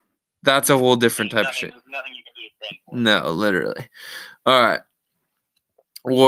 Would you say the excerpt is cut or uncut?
uncut